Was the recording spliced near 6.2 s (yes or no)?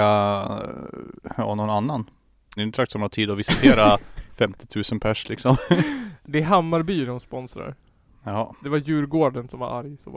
no